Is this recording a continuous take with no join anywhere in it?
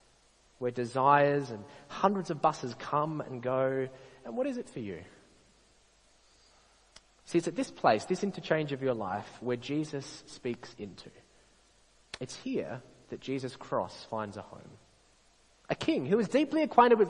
no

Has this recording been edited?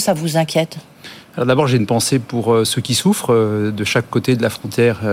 no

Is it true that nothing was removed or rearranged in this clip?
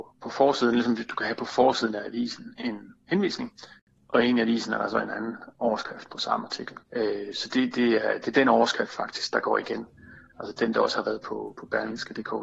no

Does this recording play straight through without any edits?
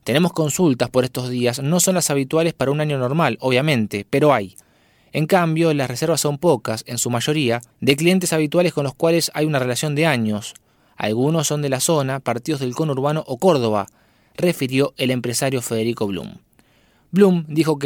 no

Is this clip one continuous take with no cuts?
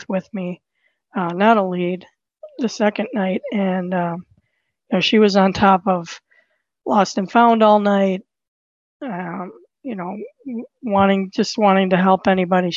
yes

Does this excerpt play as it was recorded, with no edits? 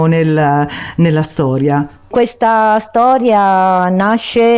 yes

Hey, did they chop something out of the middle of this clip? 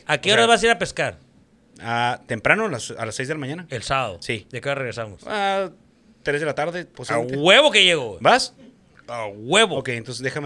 no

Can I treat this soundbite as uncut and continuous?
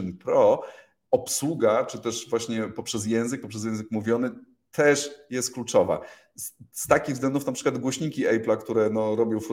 yes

